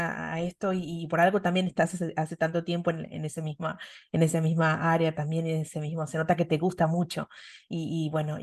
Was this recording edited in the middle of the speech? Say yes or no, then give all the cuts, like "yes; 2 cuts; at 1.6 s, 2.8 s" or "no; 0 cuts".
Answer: no; 0 cuts